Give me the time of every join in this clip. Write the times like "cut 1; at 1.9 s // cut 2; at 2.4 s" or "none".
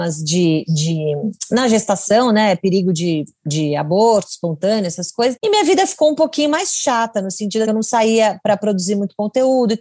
cut 1; at 5.4 s // cut 2; at 7.7 s